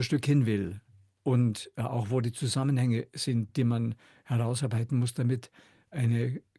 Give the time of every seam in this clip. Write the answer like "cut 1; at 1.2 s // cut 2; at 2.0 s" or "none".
none